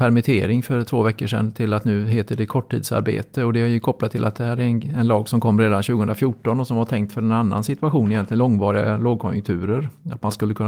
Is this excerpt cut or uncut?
uncut